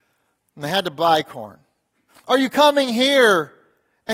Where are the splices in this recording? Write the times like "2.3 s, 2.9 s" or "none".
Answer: 2.1 s